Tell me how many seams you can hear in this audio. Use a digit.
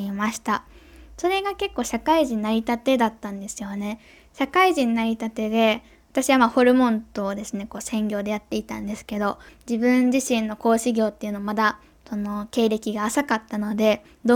1